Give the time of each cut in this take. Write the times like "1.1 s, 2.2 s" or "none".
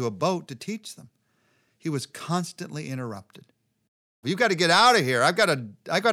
4.2 s